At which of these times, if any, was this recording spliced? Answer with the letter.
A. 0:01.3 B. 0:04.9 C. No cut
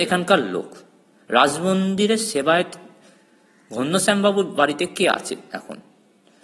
B